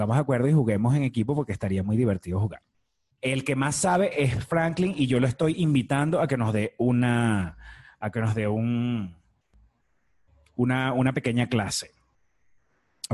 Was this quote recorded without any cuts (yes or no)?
no